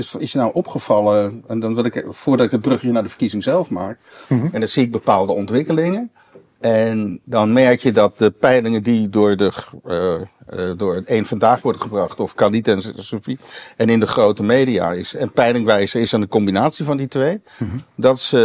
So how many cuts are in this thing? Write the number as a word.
one